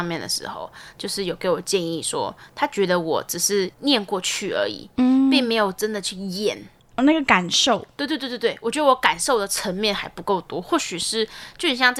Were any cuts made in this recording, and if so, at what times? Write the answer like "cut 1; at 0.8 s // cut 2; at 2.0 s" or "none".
cut 1; at 3.7 s